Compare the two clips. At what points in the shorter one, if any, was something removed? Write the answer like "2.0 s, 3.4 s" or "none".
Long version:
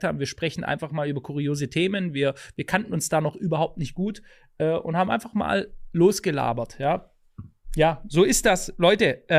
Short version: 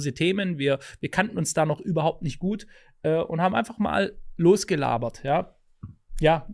none